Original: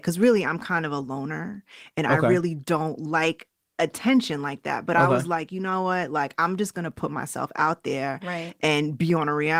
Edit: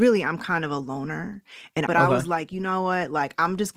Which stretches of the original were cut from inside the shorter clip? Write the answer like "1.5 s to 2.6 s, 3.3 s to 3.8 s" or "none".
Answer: 2.1 s to 4.9 s